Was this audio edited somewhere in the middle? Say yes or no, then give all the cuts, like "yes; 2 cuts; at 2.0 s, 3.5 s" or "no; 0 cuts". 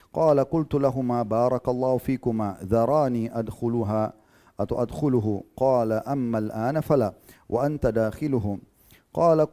no; 0 cuts